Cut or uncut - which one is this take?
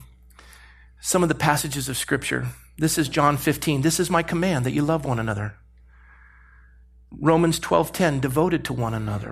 uncut